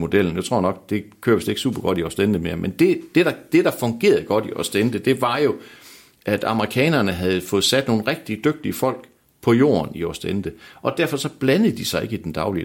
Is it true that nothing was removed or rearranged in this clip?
yes; 0 cuts

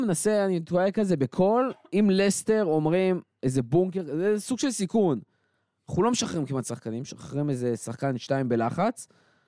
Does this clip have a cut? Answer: no; 0 cuts

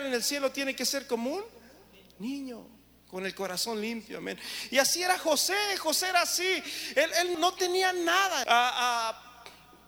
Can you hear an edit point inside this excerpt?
yes; 2 cuts; at 7.3 s, 8.4 s

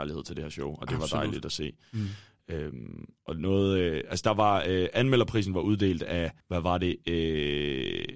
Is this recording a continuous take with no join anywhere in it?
no; 1 cut; at 6.4 s

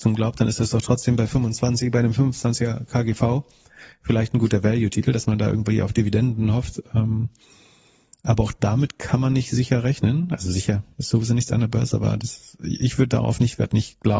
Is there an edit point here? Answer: no; 0 cuts

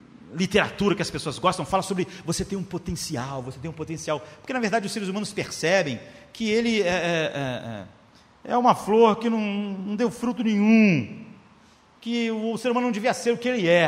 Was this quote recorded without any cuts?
yes; 0 cuts

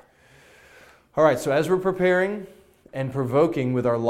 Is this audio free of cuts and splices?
yes; 0 cuts

